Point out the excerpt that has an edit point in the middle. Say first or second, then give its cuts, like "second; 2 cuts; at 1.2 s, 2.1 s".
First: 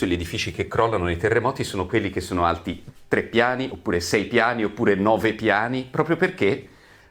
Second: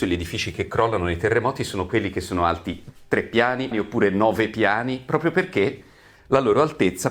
second; 1 cut; at 3.7 s